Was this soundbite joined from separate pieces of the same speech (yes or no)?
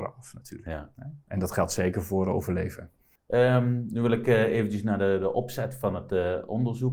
no